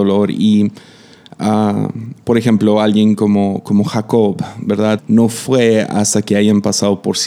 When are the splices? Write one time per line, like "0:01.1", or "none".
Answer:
0:05.0